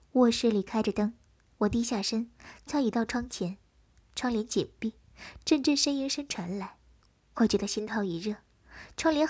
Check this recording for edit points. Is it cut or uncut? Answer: cut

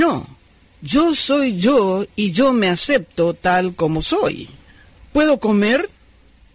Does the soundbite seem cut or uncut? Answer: cut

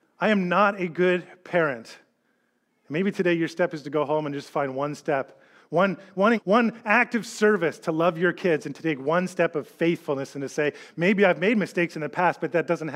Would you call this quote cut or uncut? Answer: cut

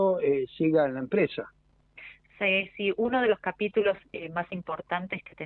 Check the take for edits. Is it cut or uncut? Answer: uncut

